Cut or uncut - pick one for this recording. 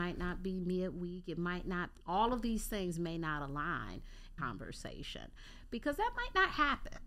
cut